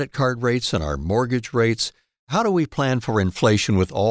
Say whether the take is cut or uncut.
uncut